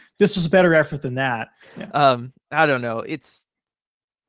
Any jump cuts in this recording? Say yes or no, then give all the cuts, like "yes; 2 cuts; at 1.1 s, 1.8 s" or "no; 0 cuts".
yes; 1 cut; at 1.6 s